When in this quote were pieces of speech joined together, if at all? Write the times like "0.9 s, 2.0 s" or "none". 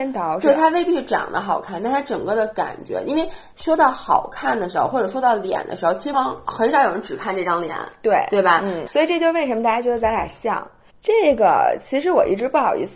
6.1 s, 8.9 s, 10.9 s